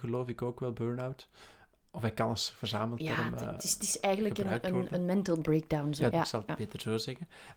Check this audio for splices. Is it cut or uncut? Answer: cut